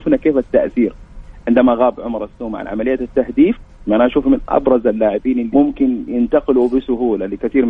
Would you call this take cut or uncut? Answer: cut